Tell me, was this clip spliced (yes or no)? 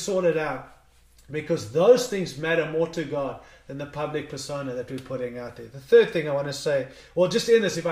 no